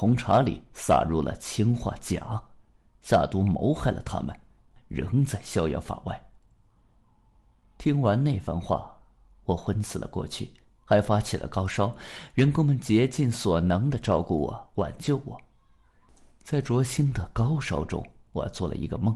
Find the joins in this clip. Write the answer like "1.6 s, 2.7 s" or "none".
4.8 s